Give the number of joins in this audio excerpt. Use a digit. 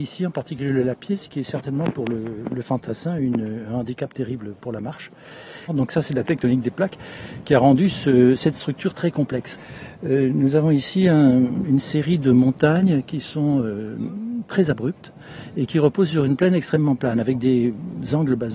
1